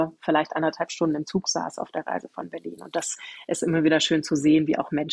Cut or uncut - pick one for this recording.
uncut